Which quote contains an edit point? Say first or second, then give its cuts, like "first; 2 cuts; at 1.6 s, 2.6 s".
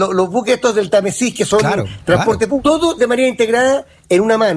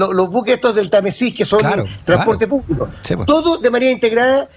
first; 1 cut; at 2.6 s